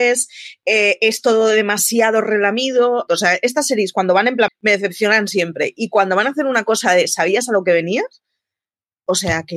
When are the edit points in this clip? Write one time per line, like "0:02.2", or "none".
0:03.1
0:04.5